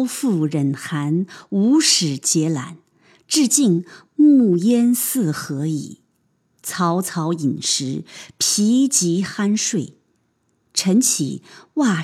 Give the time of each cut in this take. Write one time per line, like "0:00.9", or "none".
0:06.5

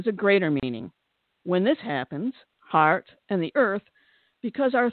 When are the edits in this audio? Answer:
0:01.2
0:02.5

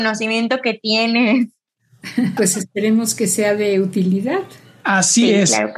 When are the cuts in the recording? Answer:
0:02.4

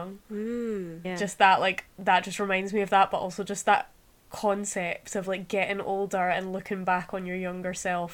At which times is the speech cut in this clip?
0:01.0

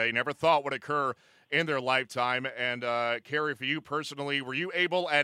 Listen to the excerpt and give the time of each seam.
none

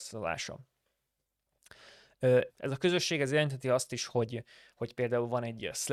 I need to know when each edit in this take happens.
0:02.5

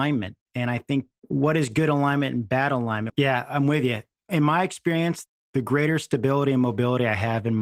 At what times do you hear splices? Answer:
0:03.1

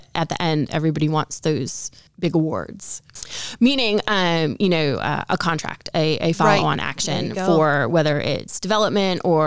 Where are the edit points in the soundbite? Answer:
none

